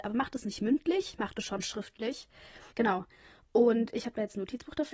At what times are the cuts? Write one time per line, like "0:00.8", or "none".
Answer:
0:02.7